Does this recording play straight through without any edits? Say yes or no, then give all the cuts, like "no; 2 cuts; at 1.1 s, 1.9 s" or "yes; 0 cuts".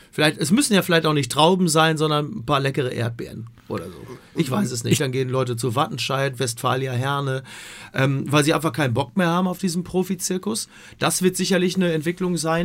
no; 1 cut; at 5.0 s